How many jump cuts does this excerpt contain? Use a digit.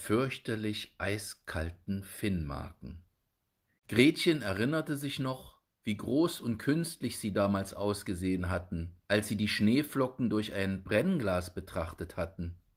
2